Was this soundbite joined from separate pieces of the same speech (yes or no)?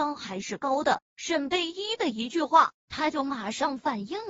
no